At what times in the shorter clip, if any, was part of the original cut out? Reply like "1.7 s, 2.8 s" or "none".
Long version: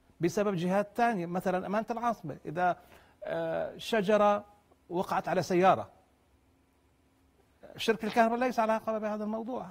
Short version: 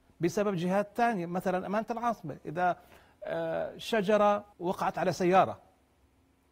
4.5 s